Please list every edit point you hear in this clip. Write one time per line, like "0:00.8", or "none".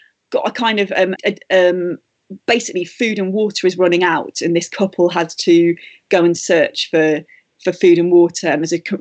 0:01.2

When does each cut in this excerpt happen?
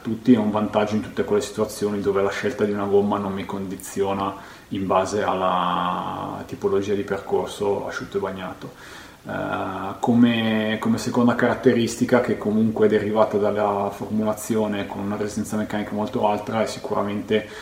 none

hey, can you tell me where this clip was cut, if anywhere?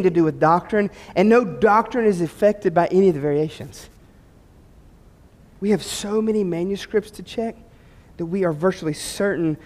none

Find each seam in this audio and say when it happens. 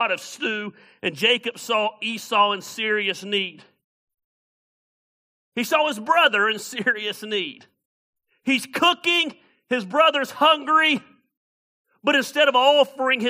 none

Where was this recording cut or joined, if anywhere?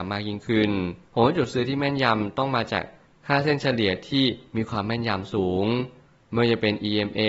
0:01.0

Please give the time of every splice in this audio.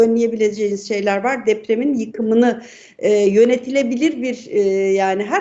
none

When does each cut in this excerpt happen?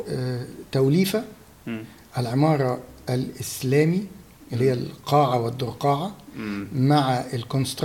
none

